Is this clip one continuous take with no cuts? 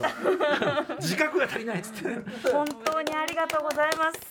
no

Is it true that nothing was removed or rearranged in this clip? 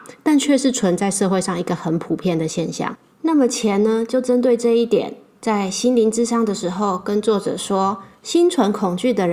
yes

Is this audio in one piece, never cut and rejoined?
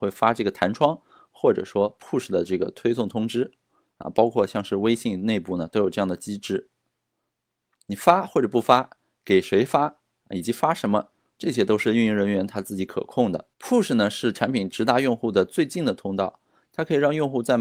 no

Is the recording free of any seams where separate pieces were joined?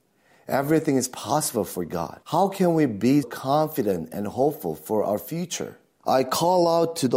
no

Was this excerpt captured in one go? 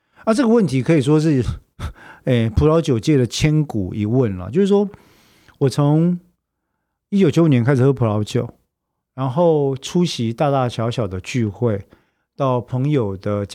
yes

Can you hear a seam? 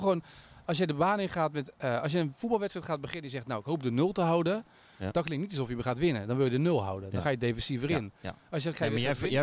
no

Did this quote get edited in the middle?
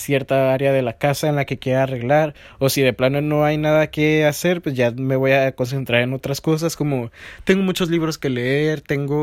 no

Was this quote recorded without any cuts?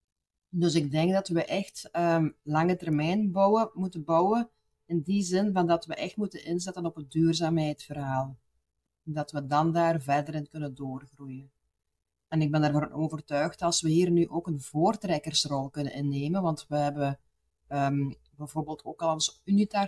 yes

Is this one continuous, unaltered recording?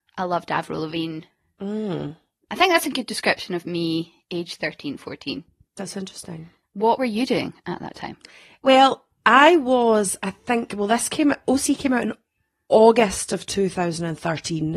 yes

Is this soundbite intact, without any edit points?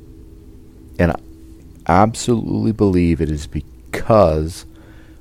no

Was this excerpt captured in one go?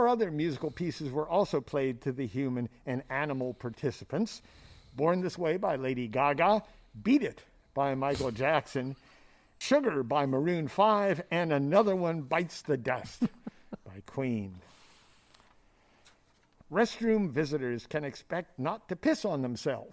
no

